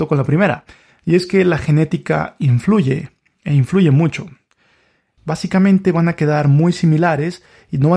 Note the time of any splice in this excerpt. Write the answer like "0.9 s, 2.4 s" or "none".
5.2 s